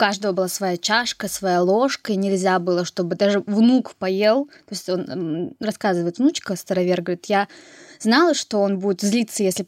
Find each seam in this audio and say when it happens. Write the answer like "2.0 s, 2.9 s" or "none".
none

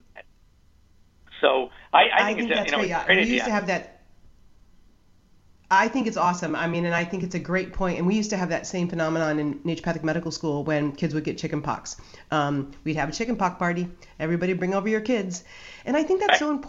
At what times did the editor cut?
none

